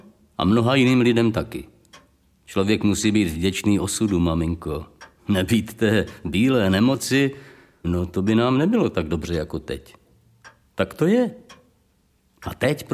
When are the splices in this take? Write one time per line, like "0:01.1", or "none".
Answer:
0:07.8